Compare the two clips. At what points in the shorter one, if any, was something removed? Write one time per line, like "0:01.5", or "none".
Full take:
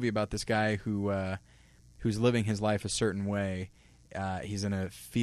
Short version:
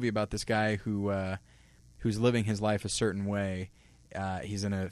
none